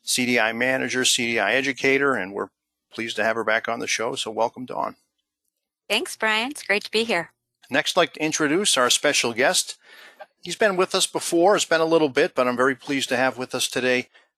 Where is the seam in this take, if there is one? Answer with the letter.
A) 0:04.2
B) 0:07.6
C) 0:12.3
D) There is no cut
B